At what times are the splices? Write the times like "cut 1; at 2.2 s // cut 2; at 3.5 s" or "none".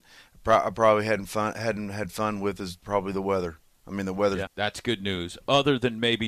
cut 1; at 4.5 s